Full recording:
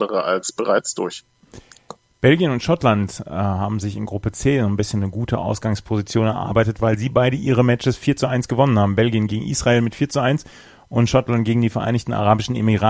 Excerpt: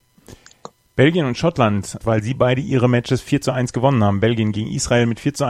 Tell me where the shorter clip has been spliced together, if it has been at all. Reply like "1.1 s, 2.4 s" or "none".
2.0 s